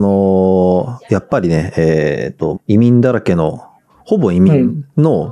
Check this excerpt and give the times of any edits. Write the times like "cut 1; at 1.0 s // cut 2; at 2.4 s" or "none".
cut 1; at 2.5 s